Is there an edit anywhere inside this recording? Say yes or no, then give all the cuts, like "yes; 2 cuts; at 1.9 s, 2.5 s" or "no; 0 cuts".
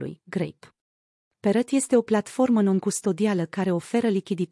yes; 1 cut; at 1.3 s